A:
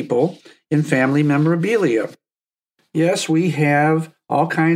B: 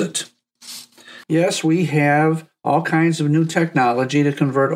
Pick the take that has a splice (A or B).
B